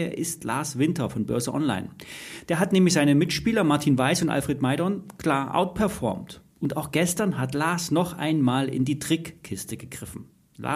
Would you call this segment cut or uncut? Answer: uncut